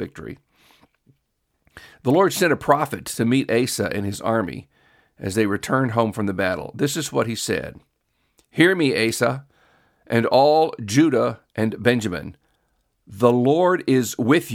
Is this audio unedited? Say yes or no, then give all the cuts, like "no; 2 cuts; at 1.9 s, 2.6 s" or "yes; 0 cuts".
yes; 0 cuts